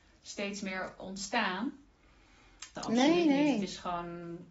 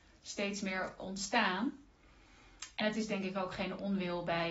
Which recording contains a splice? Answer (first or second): first